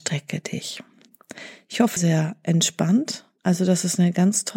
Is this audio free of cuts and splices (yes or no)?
no